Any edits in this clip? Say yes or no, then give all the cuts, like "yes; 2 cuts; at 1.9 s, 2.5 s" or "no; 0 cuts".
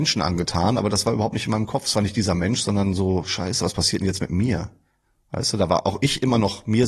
no; 0 cuts